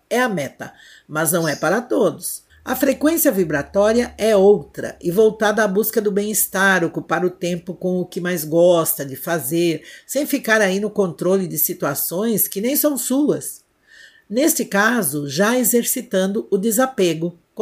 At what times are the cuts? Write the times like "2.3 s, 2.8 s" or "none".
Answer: 2.5 s